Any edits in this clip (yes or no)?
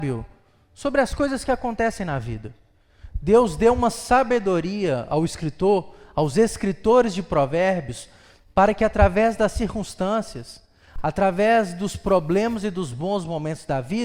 no